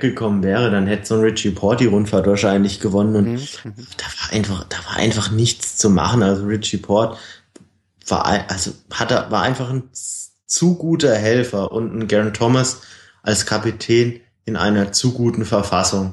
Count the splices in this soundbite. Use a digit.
0